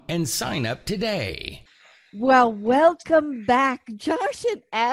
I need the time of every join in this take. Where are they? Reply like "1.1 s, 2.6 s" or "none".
none